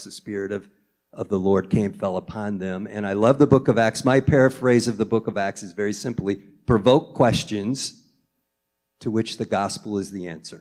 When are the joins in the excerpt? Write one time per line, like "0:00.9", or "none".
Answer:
none